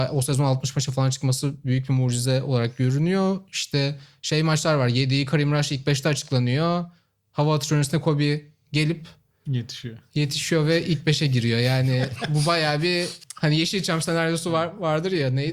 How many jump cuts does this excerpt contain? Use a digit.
0